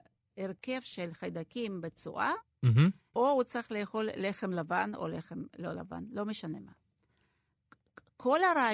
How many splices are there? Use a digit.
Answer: 1